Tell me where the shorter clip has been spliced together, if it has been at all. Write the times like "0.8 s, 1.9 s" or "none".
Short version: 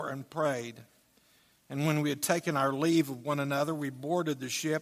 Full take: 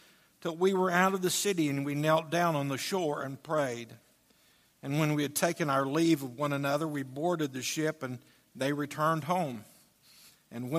none